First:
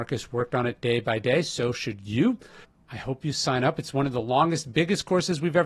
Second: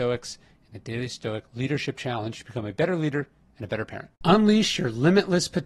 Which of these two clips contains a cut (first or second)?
second